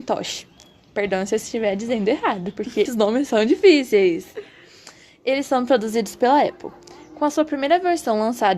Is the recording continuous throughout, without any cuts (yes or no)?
no